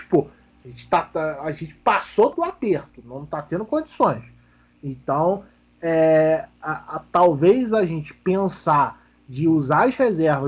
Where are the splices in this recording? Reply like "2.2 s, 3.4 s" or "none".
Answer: 2.3 s